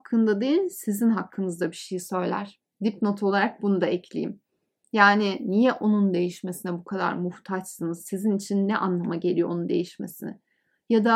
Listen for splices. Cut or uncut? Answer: uncut